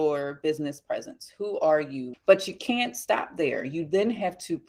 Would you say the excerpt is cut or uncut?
cut